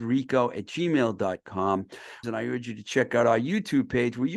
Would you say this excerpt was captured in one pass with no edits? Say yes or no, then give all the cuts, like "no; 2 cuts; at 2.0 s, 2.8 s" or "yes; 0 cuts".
no; 1 cut; at 2.2 s